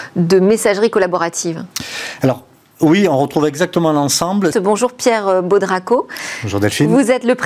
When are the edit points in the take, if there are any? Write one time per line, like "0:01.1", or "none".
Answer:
0:04.5